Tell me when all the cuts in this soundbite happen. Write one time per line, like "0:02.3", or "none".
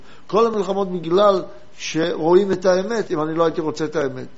0:03.1